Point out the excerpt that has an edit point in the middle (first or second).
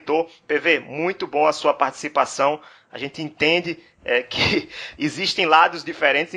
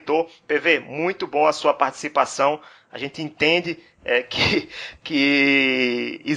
first